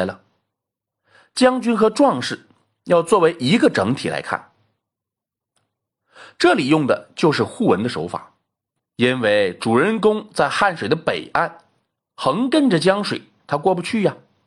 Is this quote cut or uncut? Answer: cut